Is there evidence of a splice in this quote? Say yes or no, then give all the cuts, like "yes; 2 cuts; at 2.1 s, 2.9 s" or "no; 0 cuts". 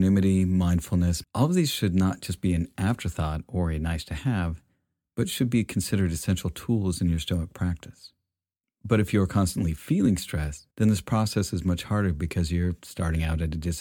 yes; 3 cuts; at 1.2 s, 8.6 s, 10.7 s